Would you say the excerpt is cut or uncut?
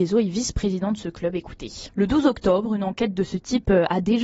cut